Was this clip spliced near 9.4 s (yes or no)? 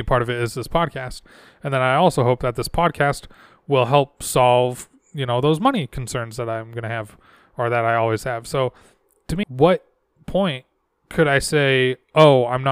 yes